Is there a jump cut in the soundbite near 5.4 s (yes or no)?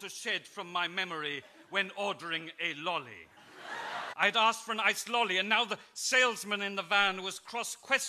no